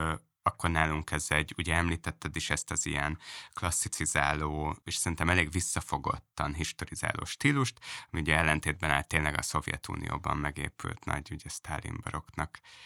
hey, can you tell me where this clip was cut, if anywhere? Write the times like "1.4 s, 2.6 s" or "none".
none